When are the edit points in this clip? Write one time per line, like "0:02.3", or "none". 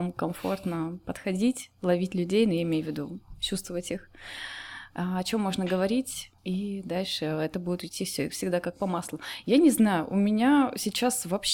0:06.4